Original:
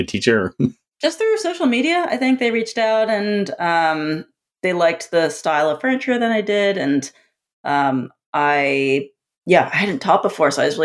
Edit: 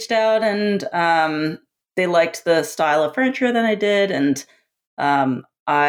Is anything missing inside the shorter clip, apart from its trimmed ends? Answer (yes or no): no